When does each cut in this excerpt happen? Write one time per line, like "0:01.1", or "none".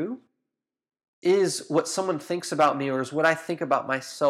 none